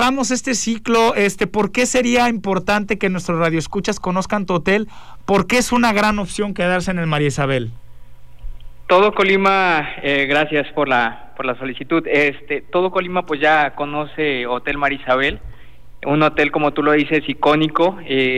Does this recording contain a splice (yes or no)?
no